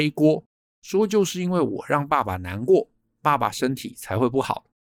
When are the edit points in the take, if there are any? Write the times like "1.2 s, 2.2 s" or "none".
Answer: none